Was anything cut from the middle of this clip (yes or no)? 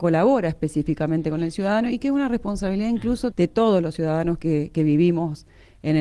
yes